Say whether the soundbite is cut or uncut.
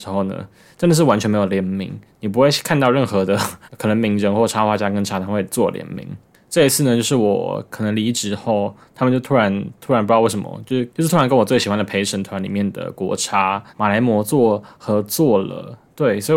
cut